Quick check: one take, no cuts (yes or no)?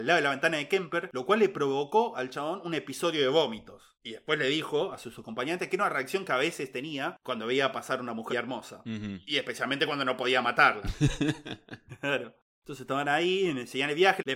no